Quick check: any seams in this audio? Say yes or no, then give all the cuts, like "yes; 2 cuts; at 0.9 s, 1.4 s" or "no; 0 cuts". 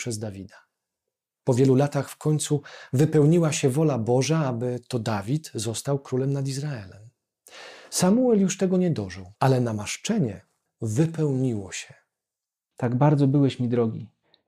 yes; 3 cuts; at 9.4 s, 10.7 s, 12.7 s